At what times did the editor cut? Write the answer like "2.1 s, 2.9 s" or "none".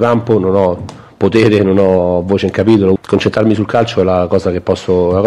3.0 s

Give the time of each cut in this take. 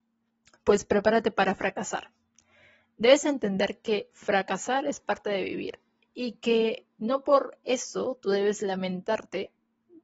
none

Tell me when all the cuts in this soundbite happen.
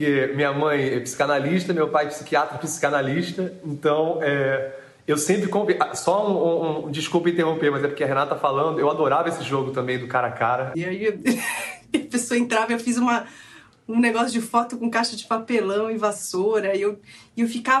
10.7 s

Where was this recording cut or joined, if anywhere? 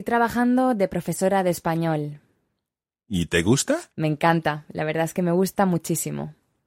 3.9 s

